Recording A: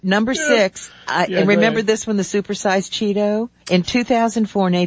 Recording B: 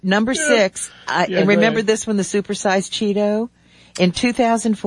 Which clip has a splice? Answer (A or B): A